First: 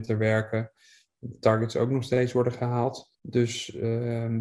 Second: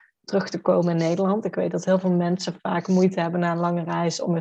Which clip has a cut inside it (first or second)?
first